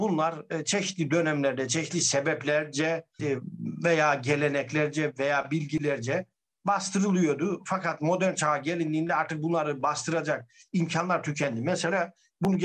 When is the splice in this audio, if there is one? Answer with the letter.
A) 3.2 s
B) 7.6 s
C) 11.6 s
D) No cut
A